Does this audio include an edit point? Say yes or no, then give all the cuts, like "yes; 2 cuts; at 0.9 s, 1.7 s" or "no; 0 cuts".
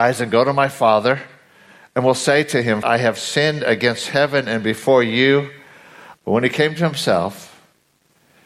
yes; 2 cuts; at 2.8 s, 6.1 s